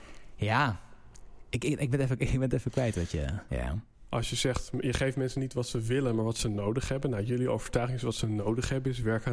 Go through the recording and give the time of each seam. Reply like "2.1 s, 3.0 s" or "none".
3.5 s